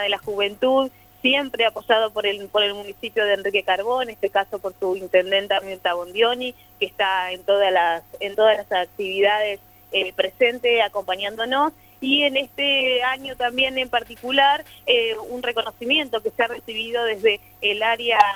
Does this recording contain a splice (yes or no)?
no